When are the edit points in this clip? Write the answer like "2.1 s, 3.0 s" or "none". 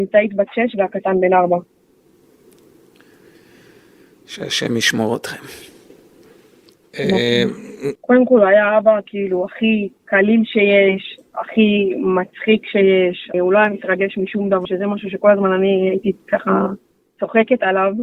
8.0 s, 13.3 s, 14.6 s